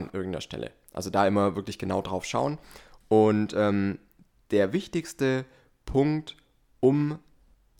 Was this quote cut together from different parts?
no; 0 cuts

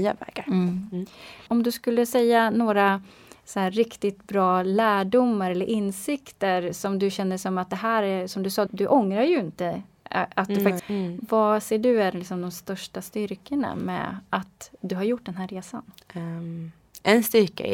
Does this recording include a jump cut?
yes; 2 cuts; at 8.7 s, 10.8 s

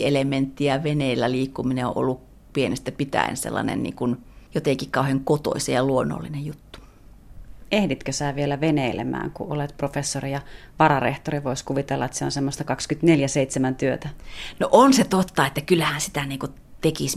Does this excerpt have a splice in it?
no; 0 cuts

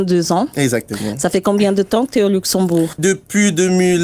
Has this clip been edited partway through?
no; 0 cuts

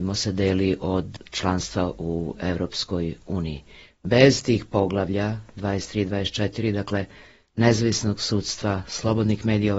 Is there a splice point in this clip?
no; 0 cuts

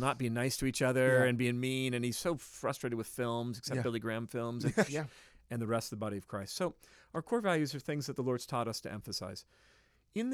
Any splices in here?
yes; 1 cut; at 4.9 s

